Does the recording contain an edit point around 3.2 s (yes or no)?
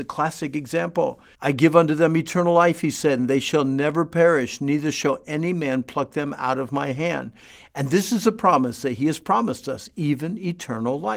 no